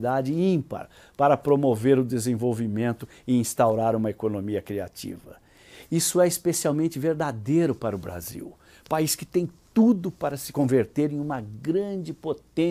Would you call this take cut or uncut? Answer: uncut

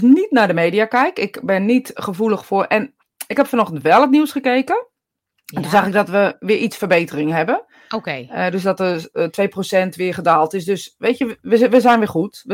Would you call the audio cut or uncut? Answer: uncut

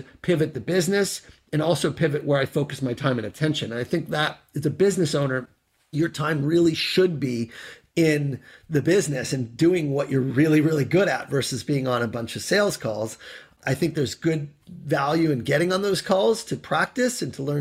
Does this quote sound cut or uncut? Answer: uncut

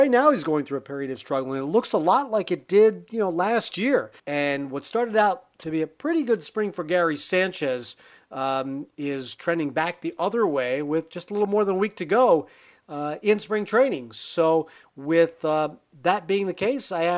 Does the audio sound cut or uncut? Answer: cut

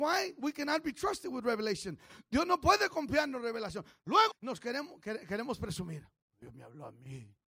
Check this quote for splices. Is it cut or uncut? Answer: cut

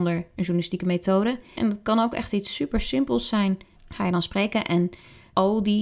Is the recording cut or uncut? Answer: cut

